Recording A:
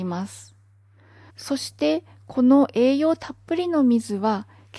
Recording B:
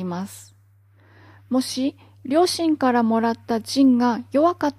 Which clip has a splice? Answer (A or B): A